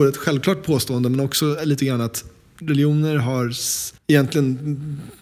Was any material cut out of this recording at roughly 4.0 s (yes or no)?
yes